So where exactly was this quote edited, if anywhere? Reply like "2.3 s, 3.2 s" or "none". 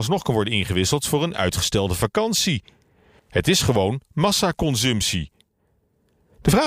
3.2 s